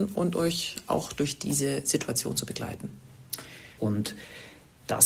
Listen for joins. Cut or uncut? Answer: cut